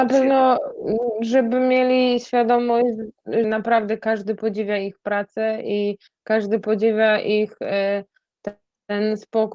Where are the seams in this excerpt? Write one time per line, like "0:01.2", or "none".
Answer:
0:03.4